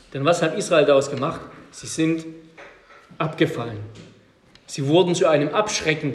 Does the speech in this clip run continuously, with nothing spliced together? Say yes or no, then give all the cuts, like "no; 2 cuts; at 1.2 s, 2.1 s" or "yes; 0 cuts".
yes; 0 cuts